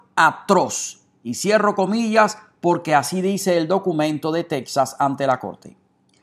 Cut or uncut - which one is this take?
uncut